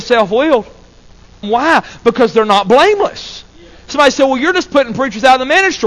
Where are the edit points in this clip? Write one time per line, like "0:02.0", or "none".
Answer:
0:01.4